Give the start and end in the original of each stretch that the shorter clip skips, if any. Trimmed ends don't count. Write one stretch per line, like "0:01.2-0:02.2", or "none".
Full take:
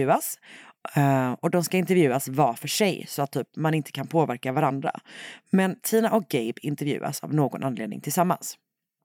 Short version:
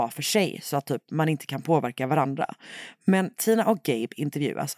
none